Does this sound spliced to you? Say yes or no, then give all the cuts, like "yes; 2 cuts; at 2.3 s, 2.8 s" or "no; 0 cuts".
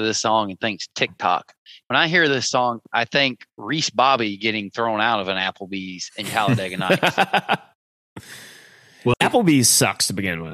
yes; 1 cut; at 9.1 s